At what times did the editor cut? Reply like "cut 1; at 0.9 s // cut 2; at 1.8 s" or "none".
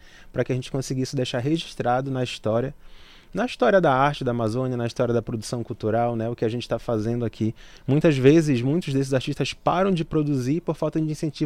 none

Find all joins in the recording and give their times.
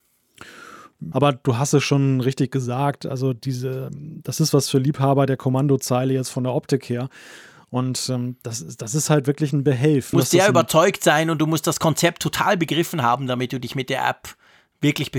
cut 1; at 1.1 s // cut 2; at 10.1 s

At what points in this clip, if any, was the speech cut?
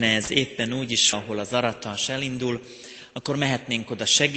cut 1; at 1.1 s

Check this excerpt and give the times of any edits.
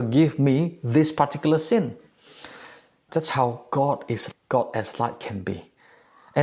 cut 1; at 3.1 s // cut 2; at 4.3 s

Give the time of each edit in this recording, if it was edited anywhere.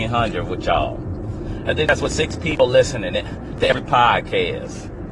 cut 1; at 1.6 s

